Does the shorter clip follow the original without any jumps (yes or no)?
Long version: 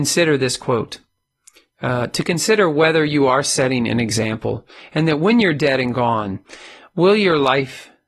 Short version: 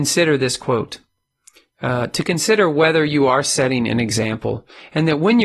yes